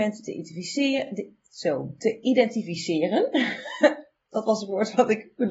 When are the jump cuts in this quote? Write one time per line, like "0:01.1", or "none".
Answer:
none